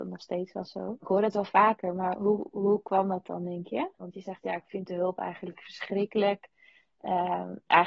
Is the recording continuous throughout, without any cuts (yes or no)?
no